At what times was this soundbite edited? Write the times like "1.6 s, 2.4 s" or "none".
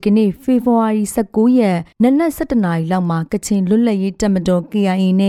1.9 s